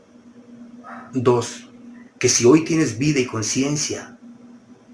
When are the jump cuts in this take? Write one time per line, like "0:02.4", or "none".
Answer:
0:01.1